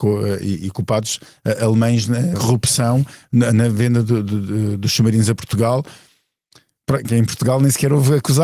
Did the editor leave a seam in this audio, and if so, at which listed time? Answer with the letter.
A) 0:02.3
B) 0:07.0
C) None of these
A